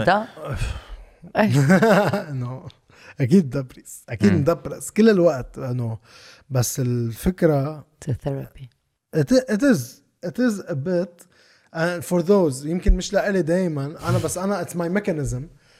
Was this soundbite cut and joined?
no; 0 cuts

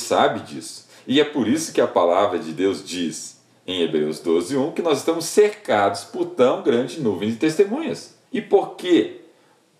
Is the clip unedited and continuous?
no; 1 cut; at 8.2 s

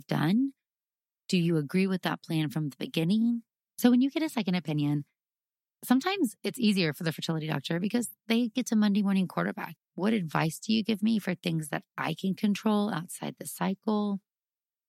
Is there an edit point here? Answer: yes; 2 cuts; at 3.7 s, 9.8 s

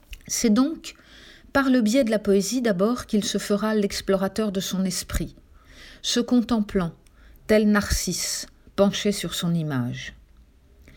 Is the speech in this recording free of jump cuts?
yes; 0 cuts

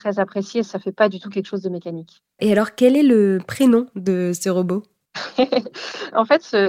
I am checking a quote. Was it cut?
no; 0 cuts

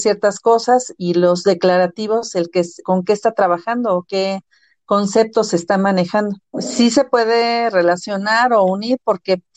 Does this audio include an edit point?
yes; 3 cuts; at 1.0 s, 2.8 s, 6.5 s

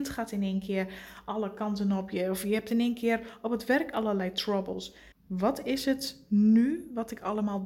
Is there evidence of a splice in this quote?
yes; 1 cut; at 5.1 s

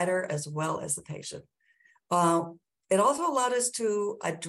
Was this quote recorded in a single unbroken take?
yes; 0 cuts

